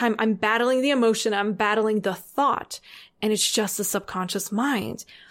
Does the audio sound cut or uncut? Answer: uncut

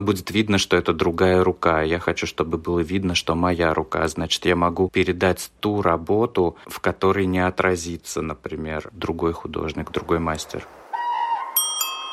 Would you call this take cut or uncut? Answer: uncut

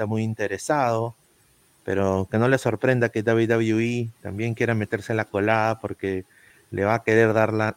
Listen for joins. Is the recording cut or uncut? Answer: cut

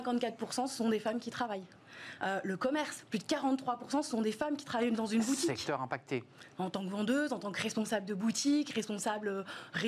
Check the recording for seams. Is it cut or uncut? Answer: uncut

